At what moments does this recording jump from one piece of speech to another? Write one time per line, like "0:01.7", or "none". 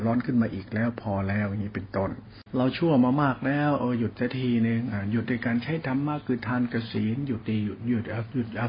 0:02.5